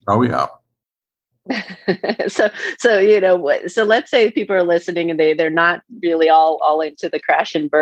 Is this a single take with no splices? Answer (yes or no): yes